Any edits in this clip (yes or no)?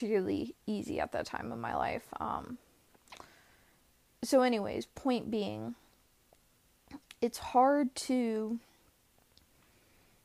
no